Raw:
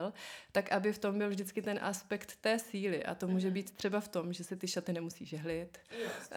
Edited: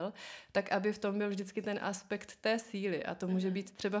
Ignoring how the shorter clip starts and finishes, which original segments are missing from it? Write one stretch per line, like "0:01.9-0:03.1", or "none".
none